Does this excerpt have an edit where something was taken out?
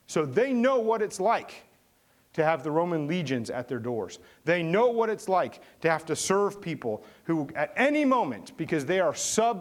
no; 0 cuts

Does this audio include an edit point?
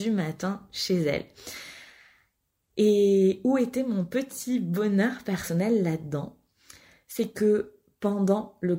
no; 0 cuts

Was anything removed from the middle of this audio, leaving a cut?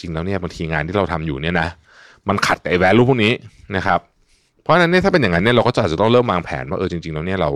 no; 0 cuts

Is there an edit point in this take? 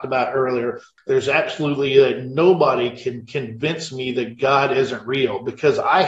yes; 1 cut; at 1.0 s

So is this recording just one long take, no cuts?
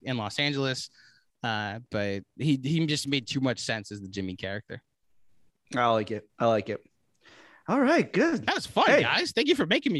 yes; 0 cuts

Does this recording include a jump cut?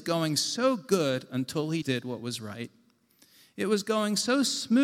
yes; 1 cut; at 1.8 s

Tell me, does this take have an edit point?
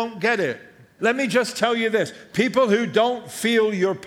yes; 1 cut; at 1.0 s

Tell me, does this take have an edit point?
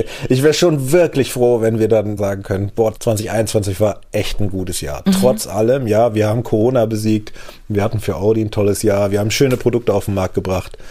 no; 0 cuts

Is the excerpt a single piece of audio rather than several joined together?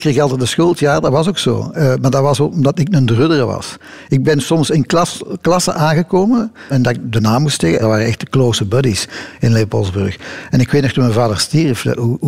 no; 2 cuts; at 6.7 s, 7.8 s

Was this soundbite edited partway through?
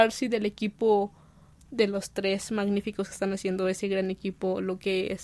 no; 0 cuts

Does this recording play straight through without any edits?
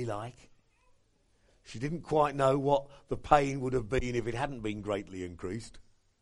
yes; 0 cuts

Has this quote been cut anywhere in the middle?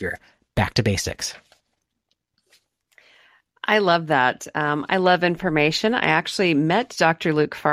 no; 0 cuts

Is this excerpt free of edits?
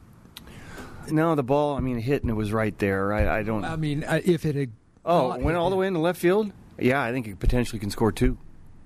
no; 1 cut; at 1.1 s

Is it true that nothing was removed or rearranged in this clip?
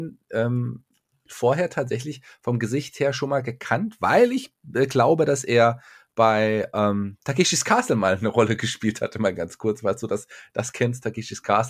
yes; 0 cuts

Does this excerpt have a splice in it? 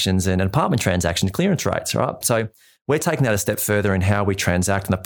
yes; 1 cut; at 2.2 s

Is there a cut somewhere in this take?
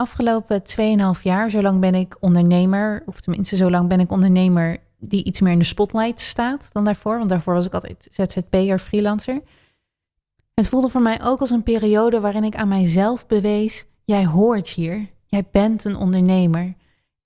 no; 0 cuts

